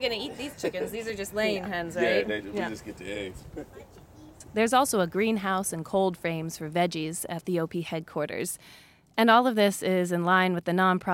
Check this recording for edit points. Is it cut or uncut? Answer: uncut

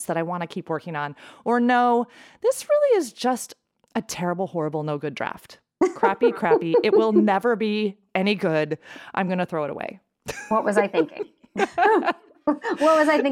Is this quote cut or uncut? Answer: uncut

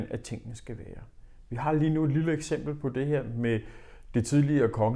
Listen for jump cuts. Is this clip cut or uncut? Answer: uncut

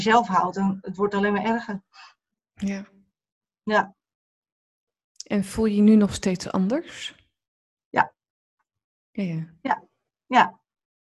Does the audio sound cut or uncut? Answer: uncut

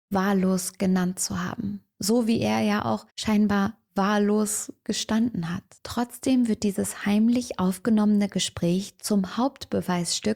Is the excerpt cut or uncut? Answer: cut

